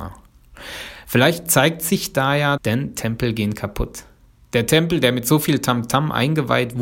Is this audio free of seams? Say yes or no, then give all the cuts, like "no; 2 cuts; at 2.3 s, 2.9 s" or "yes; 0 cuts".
no; 1 cut; at 2.6 s